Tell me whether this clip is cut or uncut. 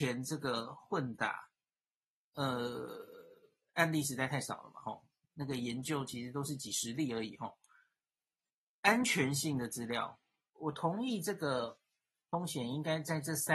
cut